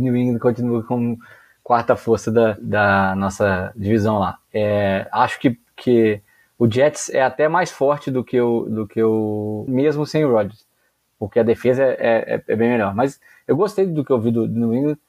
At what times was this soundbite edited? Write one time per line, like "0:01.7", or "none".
0:09.7